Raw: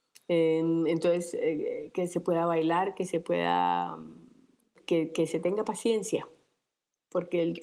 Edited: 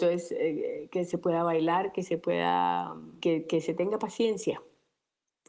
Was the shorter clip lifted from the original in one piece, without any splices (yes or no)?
no